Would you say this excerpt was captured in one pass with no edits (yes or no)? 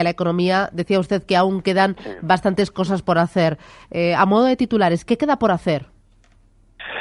yes